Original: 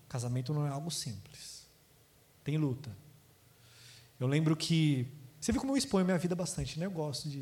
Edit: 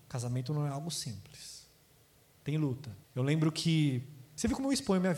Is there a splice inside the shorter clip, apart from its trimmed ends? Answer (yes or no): yes